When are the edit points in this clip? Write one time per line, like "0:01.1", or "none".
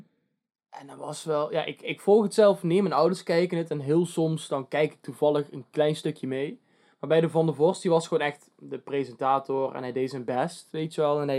none